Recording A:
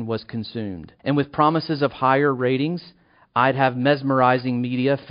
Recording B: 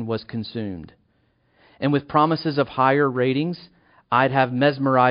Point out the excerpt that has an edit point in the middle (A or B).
A